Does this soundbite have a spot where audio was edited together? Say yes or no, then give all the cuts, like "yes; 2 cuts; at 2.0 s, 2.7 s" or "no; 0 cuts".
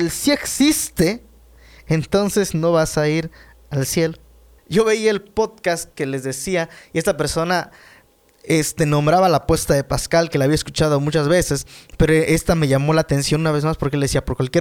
yes; 1 cut; at 4.6 s